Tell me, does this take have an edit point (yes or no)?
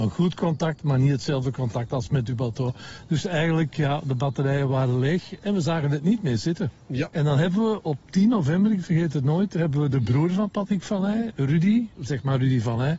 no